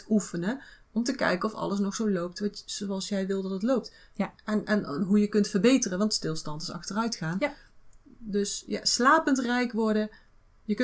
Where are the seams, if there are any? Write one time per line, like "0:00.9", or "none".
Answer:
none